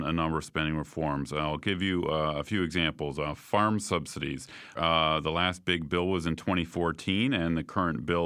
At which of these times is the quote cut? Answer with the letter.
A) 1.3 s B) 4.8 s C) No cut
B